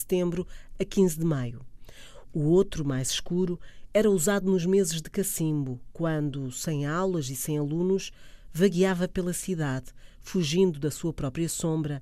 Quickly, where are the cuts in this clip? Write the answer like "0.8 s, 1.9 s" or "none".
none